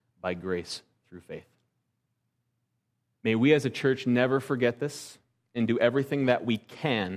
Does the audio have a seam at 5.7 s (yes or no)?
no